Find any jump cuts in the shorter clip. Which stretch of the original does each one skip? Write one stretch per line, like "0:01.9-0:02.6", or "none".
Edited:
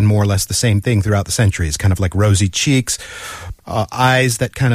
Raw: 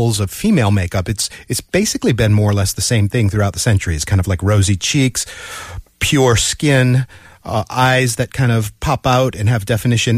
0:05.9-0:07.4